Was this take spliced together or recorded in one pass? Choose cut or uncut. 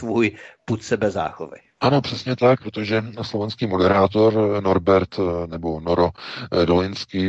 cut